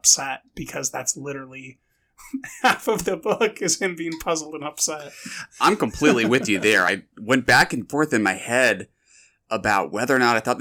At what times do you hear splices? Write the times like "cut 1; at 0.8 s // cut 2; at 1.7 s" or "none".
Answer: none